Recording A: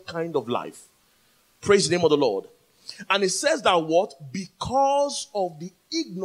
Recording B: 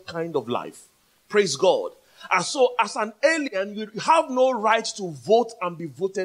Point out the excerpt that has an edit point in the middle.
B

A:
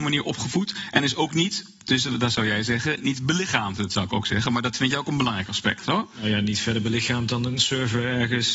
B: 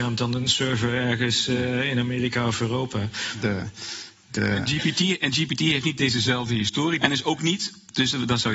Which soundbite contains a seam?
B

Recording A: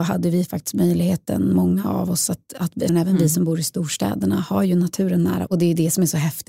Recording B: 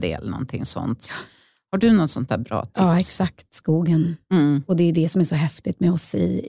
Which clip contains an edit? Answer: A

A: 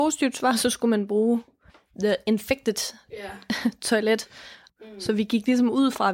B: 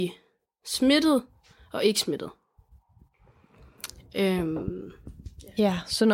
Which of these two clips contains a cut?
A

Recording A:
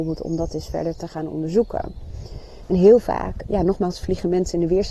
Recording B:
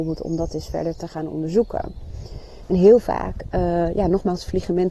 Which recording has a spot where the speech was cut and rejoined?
A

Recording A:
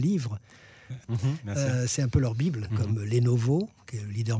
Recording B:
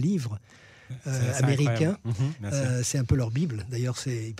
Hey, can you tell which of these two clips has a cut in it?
A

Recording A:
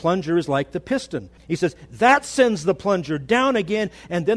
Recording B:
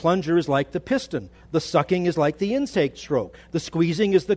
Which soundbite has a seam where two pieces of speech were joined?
A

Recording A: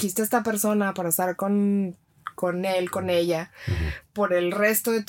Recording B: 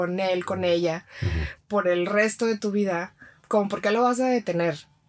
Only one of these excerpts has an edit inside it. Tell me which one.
B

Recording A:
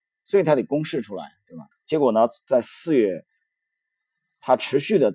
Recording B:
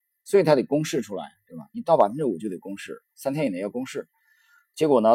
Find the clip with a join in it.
A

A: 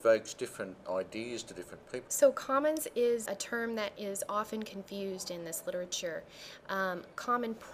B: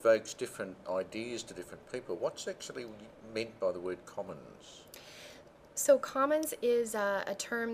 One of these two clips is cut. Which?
A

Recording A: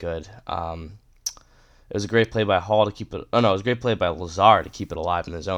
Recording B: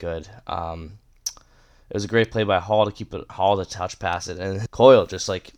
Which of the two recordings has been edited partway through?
B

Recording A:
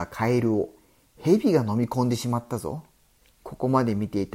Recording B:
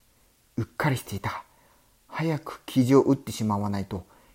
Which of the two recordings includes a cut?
A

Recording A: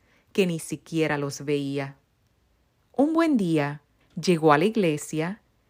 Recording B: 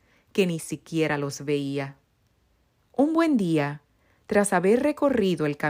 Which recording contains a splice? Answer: A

